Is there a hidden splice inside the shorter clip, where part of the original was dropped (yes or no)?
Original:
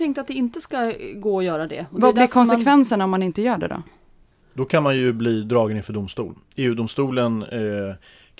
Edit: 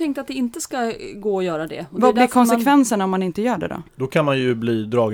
yes